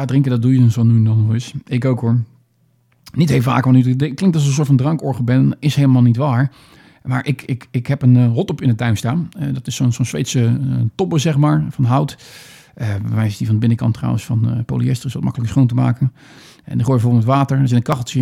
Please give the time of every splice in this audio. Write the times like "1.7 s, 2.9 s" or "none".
none